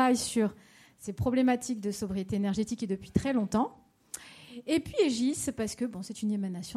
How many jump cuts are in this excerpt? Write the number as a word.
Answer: zero